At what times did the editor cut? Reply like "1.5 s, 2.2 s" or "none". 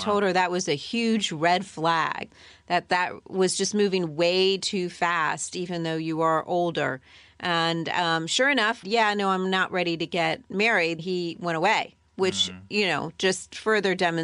8.8 s, 11.0 s

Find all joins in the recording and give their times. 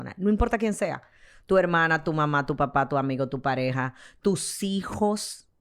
none

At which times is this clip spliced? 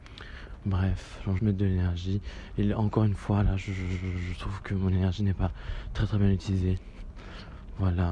1.4 s

